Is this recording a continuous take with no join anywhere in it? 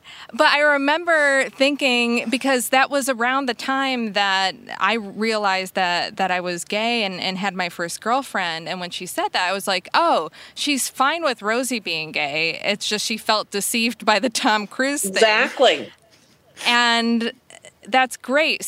yes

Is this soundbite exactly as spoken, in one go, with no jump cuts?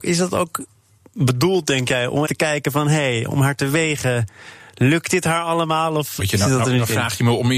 no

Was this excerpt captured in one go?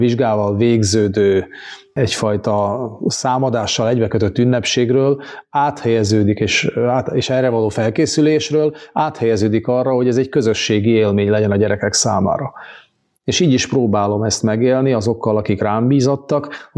yes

